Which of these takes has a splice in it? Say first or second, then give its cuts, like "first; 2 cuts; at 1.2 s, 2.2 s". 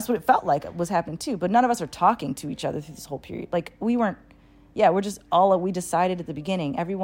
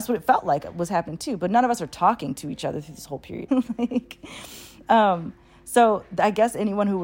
second; 1 cut; at 3.5 s